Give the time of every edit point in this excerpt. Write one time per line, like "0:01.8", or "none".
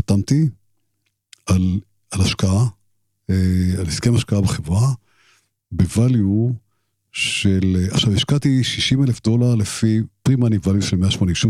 none